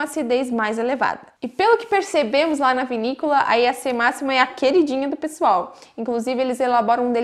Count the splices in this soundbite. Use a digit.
0